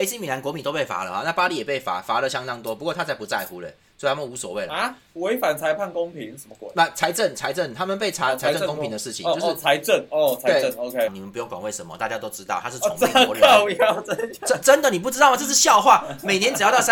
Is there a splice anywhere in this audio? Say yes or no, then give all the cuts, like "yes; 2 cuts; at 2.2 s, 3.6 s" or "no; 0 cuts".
yes; 1 cut; at 11.1 s